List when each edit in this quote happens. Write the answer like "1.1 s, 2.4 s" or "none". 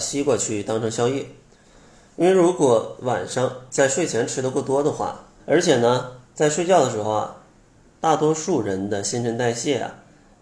5.4 s